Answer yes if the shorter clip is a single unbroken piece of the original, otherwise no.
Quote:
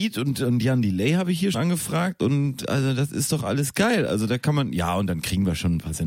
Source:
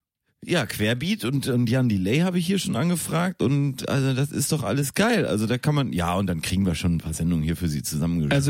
no